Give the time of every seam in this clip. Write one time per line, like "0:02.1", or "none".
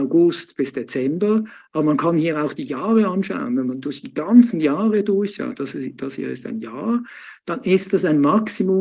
none